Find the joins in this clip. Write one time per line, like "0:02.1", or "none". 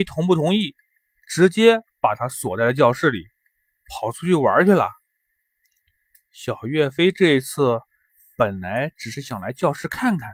none